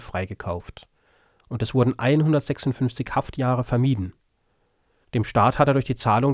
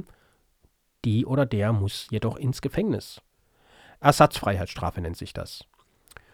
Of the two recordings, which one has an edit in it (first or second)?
first